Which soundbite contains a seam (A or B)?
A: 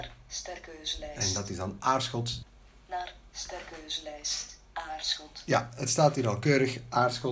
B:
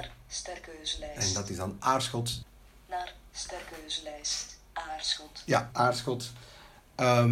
B